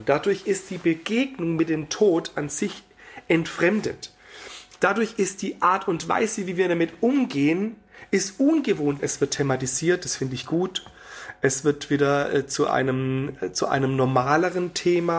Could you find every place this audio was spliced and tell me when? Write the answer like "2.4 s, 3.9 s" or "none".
9.0 s